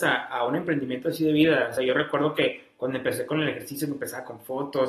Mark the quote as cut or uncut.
uncut